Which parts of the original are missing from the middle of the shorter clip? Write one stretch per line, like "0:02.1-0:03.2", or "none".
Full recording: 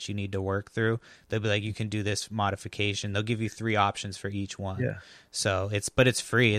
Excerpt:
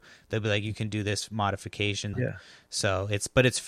0:03.1-0:04.8